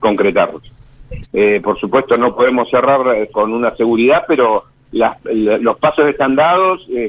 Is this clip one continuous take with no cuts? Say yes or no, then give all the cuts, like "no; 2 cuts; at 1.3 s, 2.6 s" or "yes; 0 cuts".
no; 2 cuts; at 1.2 s, 3.3 s